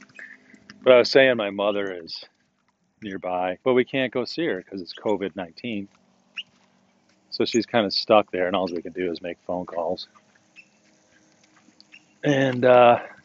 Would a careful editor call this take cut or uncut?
cut